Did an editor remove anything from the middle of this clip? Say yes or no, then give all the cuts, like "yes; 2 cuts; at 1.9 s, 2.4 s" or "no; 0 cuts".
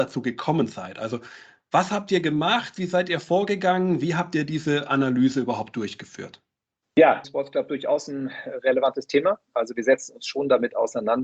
yes; 1 cut; at 7.2 s